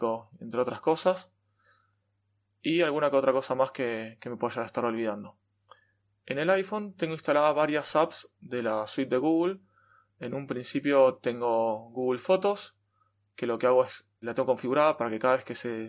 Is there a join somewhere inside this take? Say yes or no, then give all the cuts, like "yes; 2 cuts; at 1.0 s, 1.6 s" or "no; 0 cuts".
yes; 1 cut; at 14.2 s